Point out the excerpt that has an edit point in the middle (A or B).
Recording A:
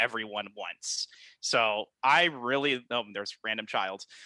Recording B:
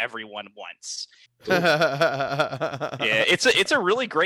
B